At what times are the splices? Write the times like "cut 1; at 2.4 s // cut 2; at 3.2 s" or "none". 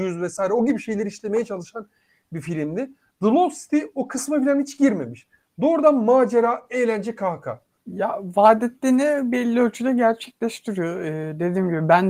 none